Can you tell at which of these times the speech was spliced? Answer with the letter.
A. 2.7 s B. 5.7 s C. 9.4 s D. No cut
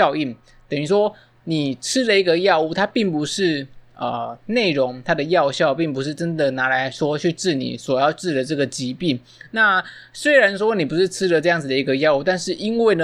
D